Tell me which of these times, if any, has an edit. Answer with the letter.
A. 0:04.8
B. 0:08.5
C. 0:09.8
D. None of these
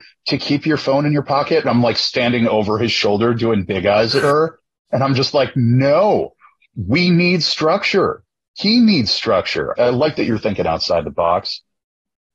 C